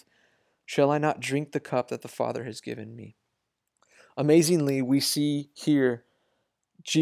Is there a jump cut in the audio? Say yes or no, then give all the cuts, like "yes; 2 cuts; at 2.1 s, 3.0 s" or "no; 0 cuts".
no; 0 cuts